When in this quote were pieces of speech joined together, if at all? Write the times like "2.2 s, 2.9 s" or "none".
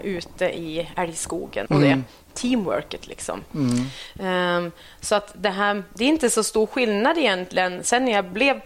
1.7 s